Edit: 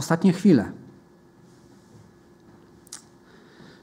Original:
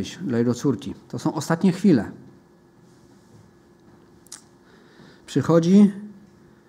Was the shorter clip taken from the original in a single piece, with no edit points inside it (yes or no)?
yes